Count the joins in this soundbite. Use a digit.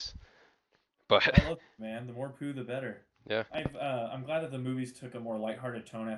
2